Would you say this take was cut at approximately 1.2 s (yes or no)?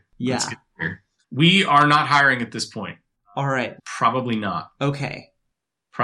yes